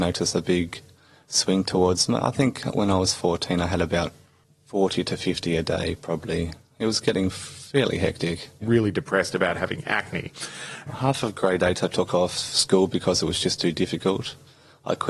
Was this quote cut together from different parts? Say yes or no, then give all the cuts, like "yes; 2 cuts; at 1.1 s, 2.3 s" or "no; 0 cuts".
yes; 2 cuts; at 8.6 s, 10.9 s